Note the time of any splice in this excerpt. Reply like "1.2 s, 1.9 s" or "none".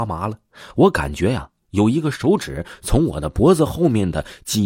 none